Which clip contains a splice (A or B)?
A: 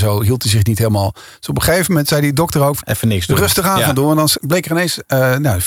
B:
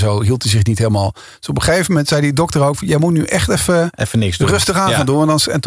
A